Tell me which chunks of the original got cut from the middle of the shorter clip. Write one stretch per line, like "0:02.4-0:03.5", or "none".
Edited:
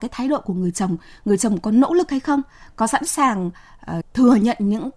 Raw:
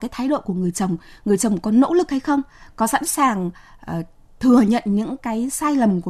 0:04.0-0:04.3